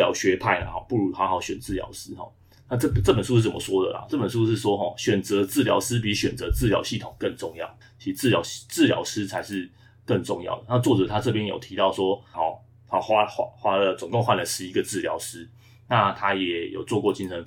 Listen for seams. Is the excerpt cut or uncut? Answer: cut